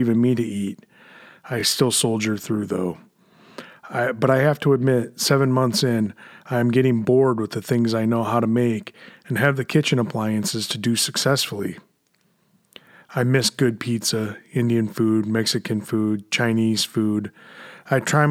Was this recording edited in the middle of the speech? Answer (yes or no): no